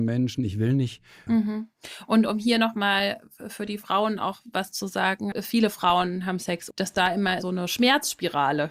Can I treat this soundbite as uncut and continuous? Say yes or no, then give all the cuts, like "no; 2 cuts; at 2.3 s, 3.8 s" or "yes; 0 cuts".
no; 3 cuts; at 1.3 s, 5.3 s, 6.7 s